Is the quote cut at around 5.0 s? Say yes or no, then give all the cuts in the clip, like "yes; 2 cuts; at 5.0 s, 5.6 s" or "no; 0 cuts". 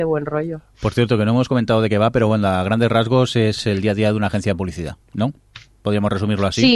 yes; 1 cut; at 5.0 s